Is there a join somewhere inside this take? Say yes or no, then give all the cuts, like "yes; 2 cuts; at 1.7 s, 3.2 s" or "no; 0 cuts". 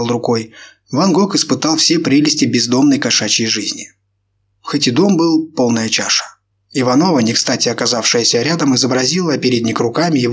yes; 1 cut; at 6.5 s